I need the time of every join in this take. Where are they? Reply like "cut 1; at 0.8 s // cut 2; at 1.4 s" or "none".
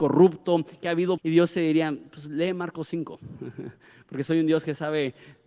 cut 1; at 1.2 s